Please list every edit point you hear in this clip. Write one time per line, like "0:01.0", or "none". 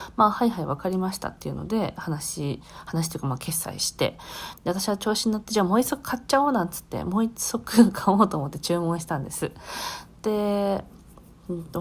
0:04.6